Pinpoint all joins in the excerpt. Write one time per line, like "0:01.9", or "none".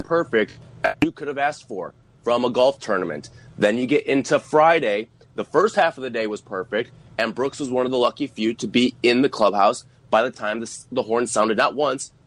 none